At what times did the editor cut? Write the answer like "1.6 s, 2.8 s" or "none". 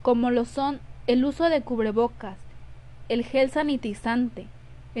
none